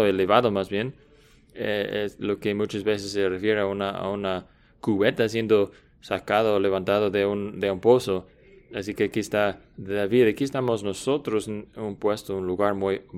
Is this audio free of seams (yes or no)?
yes